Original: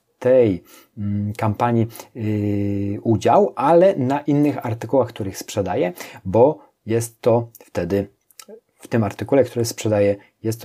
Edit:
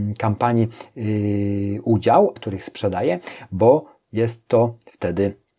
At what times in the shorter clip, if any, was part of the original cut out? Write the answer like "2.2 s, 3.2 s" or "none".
2.4 s